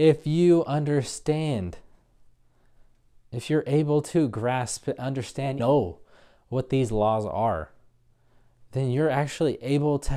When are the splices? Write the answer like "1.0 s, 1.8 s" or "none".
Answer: 5.6 s